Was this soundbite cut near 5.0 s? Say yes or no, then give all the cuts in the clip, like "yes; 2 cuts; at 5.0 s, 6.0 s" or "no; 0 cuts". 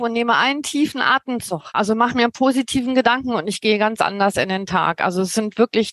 no; 1 cut; at 1.7 s